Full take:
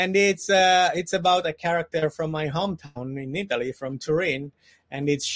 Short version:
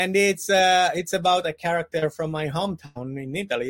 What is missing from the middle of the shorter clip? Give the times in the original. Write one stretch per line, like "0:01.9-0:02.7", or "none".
none

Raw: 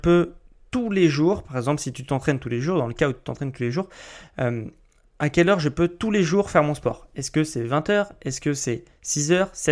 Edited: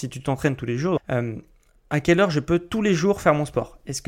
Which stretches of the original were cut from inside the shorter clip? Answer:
0:02.8-0:04.3

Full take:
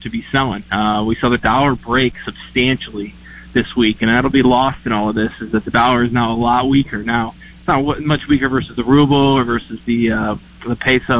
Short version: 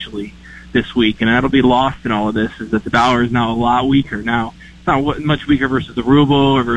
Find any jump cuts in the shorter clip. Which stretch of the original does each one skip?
none

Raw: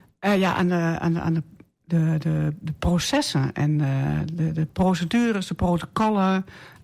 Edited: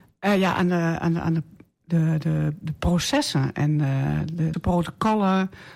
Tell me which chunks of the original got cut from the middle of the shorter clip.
0:04.5-0:05.5

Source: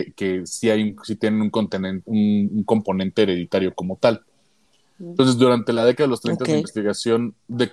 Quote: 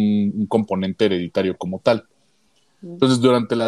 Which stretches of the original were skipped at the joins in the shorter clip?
none

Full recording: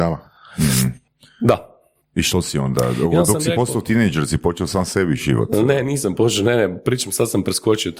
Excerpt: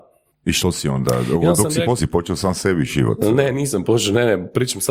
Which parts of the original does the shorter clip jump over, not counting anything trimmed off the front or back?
0:03.7-0:04.3

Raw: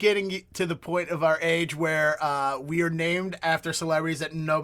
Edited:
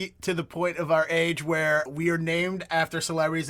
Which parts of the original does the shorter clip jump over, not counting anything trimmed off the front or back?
0:02.2-0:02.6

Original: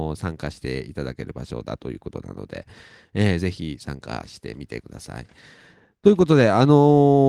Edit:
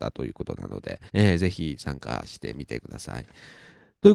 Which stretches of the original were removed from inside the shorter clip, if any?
0:02.7-0:03.1

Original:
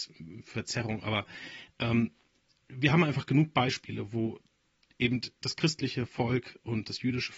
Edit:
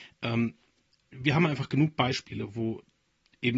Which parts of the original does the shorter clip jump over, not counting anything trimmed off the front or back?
none

